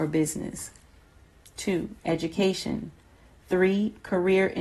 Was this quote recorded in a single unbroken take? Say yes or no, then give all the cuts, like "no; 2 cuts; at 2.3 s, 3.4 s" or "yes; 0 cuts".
yes; 0 cuts